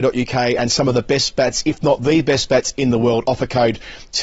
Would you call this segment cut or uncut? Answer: uncut